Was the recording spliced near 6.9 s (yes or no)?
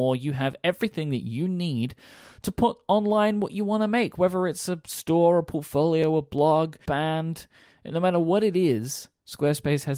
yes